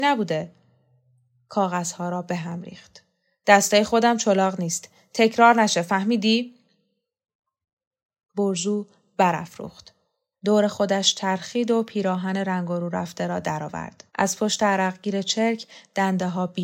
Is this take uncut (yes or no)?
no